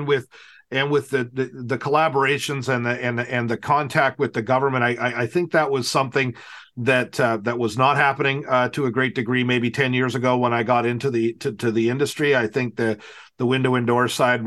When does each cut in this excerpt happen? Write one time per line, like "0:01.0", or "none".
none